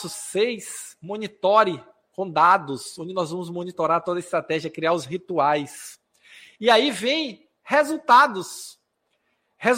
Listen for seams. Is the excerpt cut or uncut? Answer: uncut